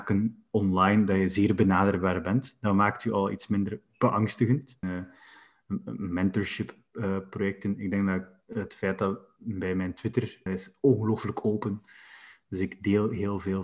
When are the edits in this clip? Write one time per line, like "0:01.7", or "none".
0:04.8
0:10.5